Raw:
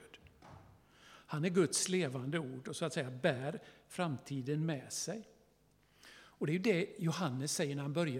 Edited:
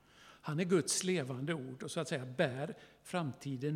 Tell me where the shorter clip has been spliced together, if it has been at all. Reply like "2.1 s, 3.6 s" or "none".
none